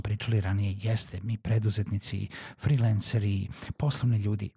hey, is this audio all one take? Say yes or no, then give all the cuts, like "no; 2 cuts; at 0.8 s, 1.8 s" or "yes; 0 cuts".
yes; 0 cuts